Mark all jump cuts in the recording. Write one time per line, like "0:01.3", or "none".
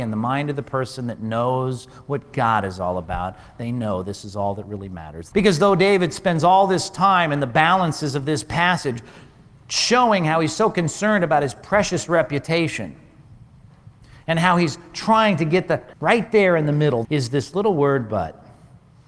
0:05.3
0:15.9
0:17.0